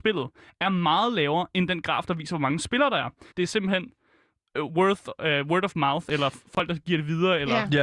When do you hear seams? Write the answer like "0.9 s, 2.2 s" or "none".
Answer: 3.3 s